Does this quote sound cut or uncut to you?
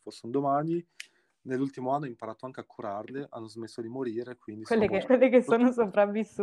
cut